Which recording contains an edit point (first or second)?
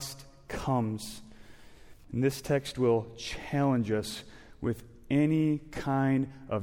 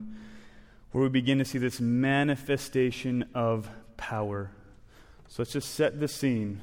first